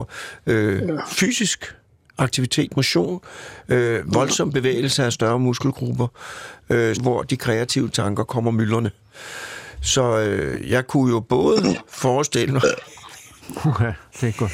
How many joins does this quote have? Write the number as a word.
one